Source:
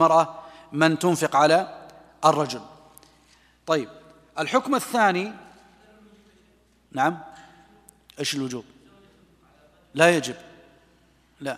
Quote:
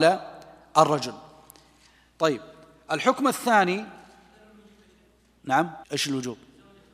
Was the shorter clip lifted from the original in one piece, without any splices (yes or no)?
no